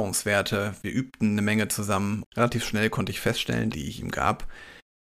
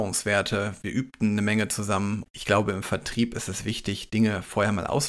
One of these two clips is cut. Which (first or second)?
first